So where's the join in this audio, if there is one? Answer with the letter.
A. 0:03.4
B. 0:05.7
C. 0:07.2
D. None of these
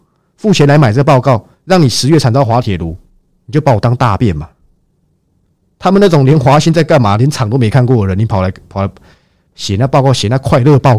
B